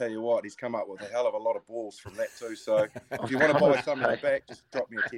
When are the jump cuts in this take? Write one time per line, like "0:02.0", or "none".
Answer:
none